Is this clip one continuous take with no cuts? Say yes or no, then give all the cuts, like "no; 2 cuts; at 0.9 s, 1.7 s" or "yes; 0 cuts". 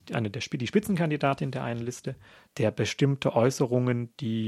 no; 1 cut; at 2.5 s